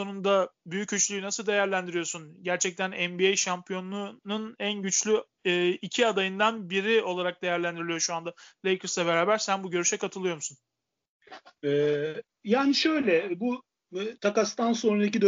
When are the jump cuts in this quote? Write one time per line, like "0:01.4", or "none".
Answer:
none